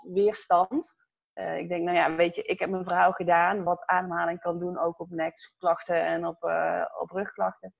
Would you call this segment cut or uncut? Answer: uncut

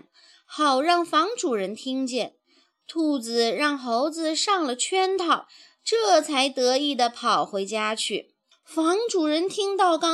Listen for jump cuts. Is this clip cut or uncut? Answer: cut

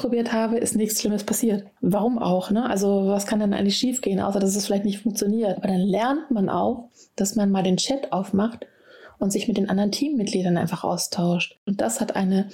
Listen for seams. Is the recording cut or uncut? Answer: cut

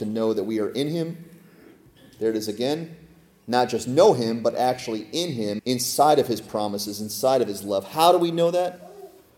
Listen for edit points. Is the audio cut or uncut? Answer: cut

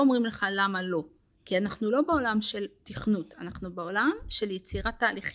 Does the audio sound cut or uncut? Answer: uncut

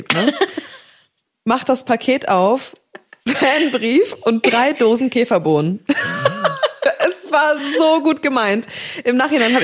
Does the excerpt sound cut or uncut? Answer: uncut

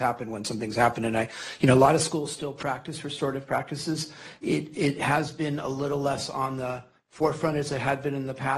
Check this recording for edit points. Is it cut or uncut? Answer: uncut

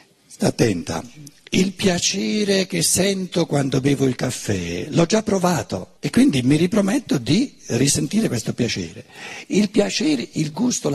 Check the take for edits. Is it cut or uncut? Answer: cut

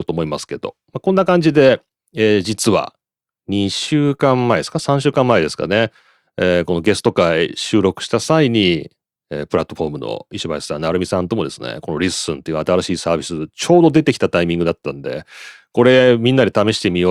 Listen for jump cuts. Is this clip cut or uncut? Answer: uncut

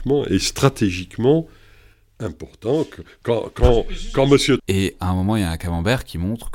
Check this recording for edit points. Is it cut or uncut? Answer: cut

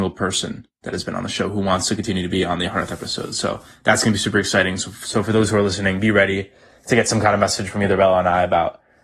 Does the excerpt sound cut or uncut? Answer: uncut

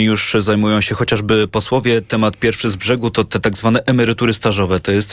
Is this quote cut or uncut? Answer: uncut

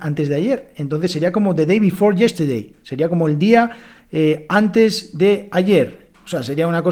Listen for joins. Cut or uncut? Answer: uncut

